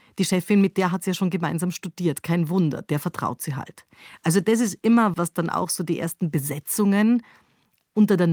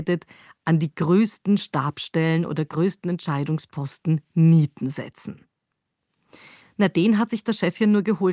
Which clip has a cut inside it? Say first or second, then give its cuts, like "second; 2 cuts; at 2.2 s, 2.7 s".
first; 1 cut; at 5.1 s